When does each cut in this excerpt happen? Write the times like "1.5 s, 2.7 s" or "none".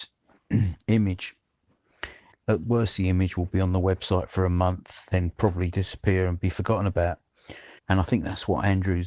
2.3 s, 7.8 s